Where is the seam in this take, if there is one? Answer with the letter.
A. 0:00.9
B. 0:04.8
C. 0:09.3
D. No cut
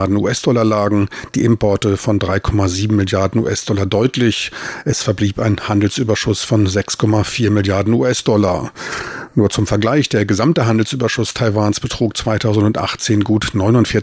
D